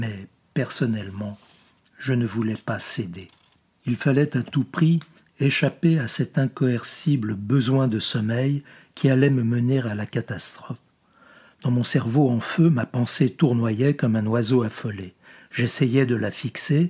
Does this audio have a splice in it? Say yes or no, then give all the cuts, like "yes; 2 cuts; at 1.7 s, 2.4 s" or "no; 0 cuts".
no; 0 cuts